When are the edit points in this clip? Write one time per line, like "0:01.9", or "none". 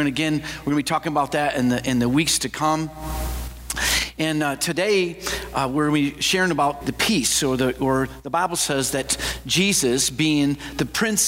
0:06.8

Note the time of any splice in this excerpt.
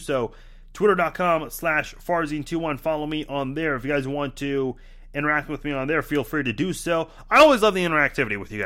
none

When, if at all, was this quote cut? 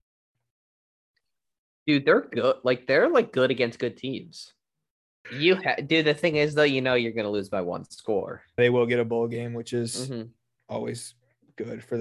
0:05.2
0:08.6

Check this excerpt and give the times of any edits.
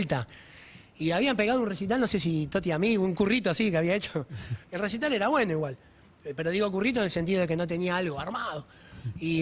0:04.6

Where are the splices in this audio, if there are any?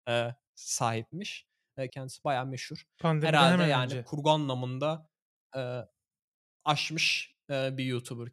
0:01.9

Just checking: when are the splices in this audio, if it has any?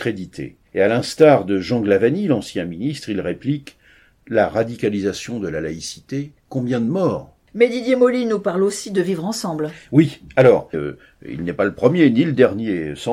0:10.7

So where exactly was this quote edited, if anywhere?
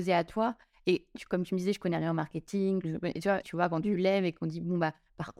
0:03.4

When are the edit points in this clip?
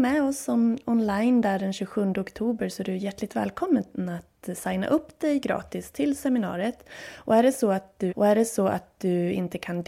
0:08.1

